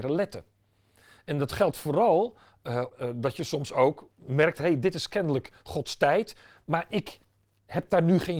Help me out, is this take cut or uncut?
cut